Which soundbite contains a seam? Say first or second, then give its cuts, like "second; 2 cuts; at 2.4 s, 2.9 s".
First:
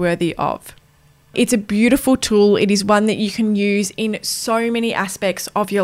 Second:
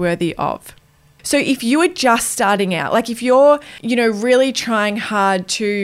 second; 1 cut; at 1.2 s